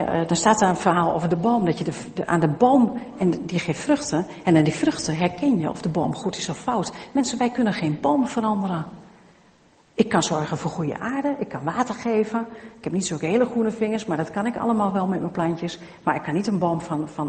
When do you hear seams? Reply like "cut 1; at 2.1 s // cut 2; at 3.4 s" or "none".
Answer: none